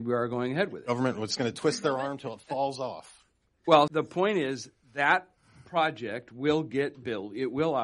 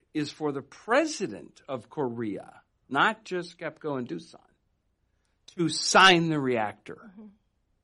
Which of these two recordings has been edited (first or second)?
first